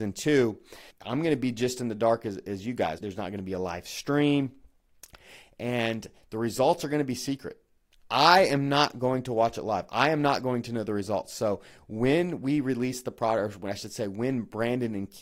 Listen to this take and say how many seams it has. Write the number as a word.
two